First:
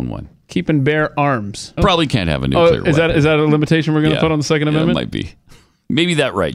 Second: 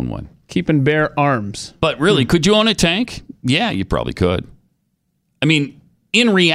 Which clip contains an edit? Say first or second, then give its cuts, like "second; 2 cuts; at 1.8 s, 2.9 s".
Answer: first; 1 cut; at 1.8 s